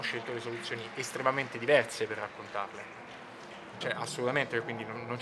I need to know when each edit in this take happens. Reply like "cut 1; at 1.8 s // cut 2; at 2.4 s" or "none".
cut 1; at 3.8 s